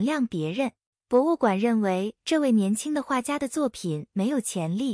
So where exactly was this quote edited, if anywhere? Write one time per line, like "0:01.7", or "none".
0:00.9